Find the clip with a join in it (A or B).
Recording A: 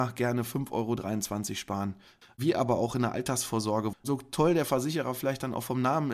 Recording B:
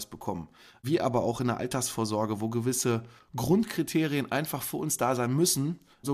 A